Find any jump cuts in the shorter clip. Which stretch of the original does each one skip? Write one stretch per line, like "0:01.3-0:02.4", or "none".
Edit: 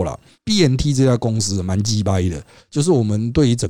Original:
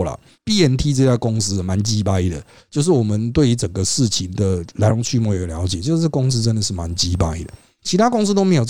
none